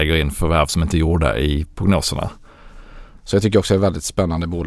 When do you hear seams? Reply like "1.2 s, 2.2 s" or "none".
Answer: 3.2 s